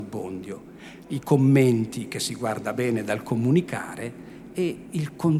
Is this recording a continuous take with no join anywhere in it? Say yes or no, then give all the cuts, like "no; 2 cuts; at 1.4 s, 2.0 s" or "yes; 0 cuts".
no; 1 cut; at 1.0 s